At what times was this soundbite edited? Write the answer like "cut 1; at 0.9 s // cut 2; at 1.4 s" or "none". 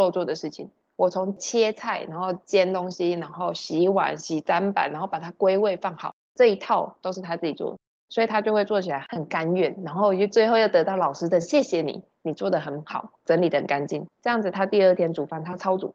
none

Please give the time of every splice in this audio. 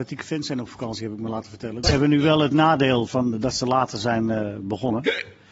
cut 1; at 1.8 s // cut 2; at 3.1 s

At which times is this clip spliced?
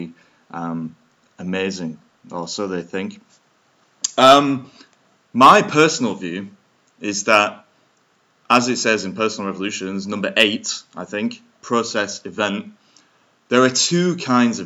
none

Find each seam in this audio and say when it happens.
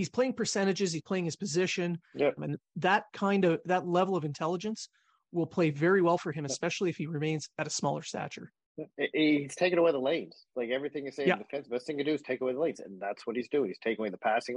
cut 1; at 2.4 s

